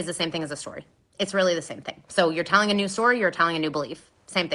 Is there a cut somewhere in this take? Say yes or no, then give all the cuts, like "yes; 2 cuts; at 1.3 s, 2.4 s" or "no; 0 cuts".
no; 0 cuts